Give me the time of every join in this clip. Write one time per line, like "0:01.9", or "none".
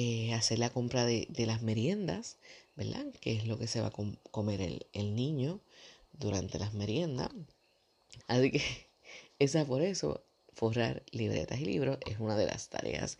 0:08.2